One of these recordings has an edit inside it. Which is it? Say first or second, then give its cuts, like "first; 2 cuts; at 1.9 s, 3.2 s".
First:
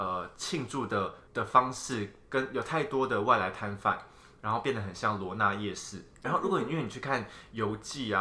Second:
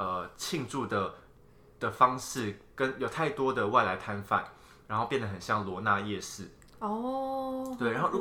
first; 2 cuts; at 1.3 s, 6.2 s